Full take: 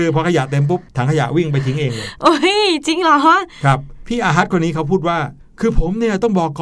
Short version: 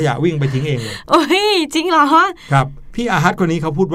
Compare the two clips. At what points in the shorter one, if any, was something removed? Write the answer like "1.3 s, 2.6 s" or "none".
none